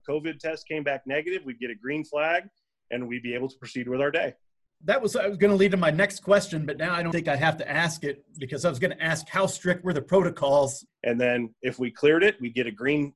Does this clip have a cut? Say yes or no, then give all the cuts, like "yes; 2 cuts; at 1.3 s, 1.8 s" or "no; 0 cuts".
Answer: yes; 2 cuts; at 7.1 s, 10.9 s